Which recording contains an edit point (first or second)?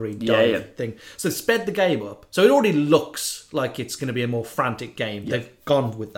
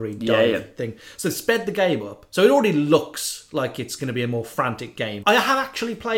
second